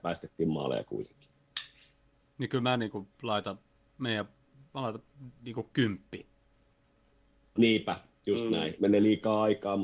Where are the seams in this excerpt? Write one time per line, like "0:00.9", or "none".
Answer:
0:04.7
0:07.6
0:08.8